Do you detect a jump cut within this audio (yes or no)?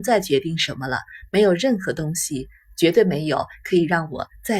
no